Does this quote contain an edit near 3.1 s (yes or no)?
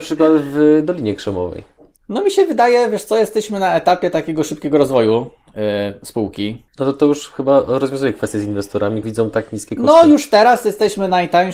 no